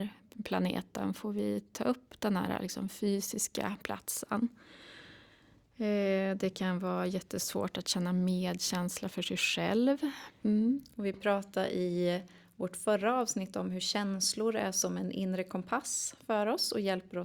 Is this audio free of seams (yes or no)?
no